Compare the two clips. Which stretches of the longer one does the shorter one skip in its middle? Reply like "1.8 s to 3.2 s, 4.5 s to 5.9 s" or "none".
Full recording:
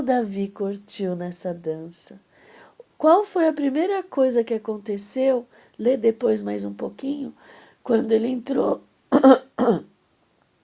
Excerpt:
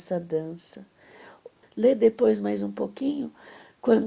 3.0 s to 5.6 s